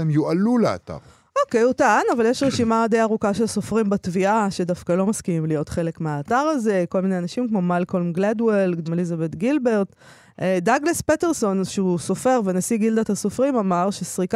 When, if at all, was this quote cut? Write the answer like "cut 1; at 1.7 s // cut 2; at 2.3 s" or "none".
cut 1; at 8.8 s